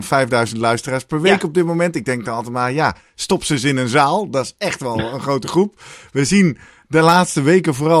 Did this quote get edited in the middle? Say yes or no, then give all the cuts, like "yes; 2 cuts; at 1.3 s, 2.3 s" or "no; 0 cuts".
no; 0 cuts